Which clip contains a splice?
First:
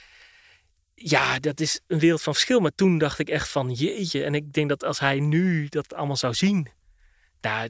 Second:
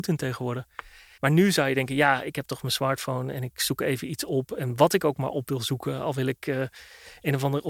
second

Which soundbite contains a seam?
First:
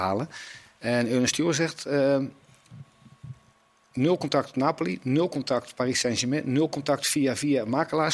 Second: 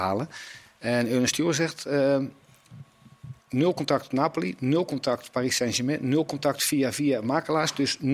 second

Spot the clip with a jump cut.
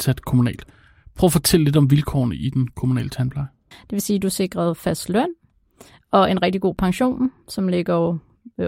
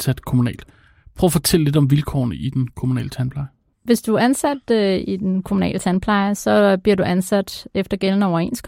first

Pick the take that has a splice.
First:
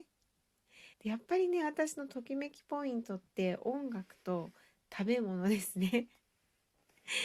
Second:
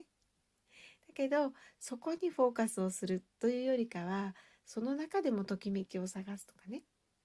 first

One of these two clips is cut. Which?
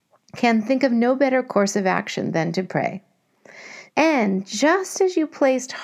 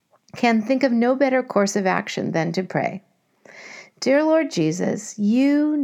first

